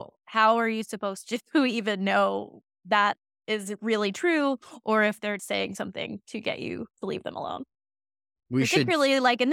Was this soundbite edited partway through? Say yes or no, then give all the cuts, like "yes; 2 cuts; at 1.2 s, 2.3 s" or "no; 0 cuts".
yes; 2 cuts; at 5.4 s, 6.9 s